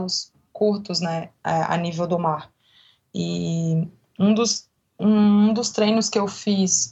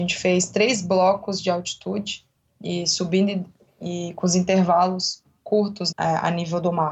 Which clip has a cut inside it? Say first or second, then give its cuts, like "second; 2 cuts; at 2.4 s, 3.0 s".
second; 1 cut; at 5.9 s